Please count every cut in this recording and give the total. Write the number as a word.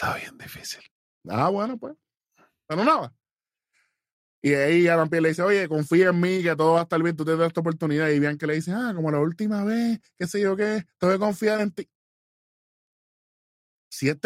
zero